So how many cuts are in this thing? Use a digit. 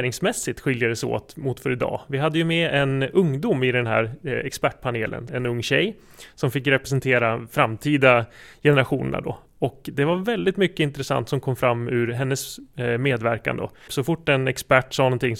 2